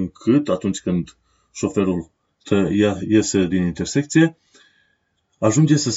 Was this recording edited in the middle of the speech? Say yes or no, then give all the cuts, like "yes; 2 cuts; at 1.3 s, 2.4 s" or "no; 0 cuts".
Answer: yes; 1 cut; at 3.5 s